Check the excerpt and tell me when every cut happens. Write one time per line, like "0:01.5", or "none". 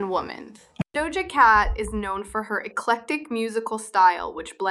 none